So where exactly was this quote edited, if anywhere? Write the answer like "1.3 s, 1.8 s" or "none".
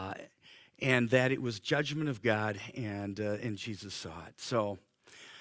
none